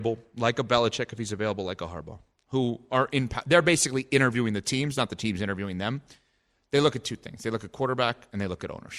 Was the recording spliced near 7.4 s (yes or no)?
no